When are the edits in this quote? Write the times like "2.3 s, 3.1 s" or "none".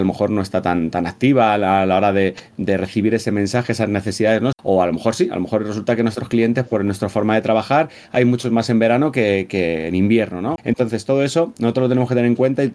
4.5 s, 10.6 s